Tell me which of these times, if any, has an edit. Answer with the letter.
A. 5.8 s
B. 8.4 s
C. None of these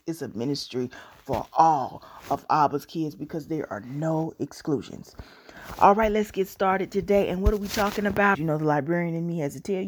B